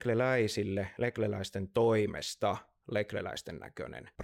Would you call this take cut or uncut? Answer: uncut